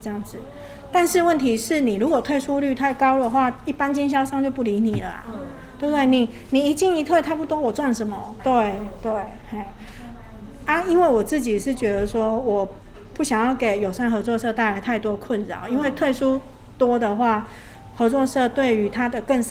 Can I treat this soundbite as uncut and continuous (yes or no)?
no